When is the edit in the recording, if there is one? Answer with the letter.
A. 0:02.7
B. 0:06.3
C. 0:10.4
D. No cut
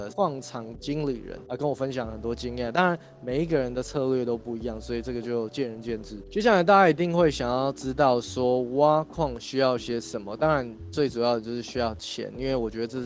D